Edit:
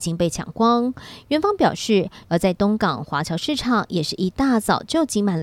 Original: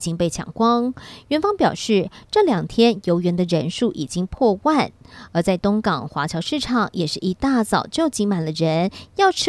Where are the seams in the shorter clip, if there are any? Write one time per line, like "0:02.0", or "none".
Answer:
0:02.2